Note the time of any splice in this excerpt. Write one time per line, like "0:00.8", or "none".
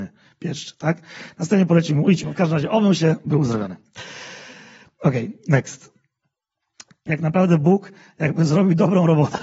0:02.2
0:07.1